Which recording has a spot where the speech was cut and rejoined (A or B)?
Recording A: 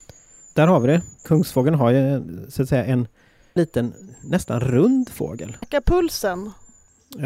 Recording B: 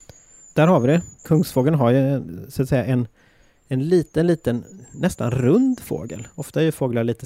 A